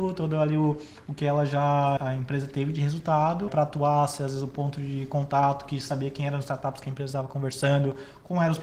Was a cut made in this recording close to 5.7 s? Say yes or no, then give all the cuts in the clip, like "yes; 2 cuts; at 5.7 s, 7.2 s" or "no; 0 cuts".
no; 2 cuts; at 2.0 s, 3.5 s